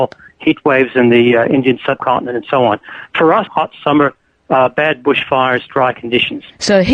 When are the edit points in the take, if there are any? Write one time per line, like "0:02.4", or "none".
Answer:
0:03.5